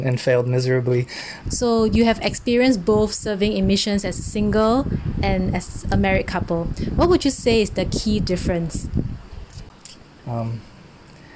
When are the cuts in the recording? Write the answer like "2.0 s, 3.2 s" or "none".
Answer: 1.5 s, 10.2 s